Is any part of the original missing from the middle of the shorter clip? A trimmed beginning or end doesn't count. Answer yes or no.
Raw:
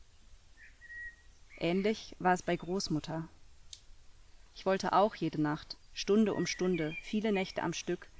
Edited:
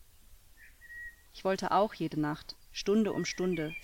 yes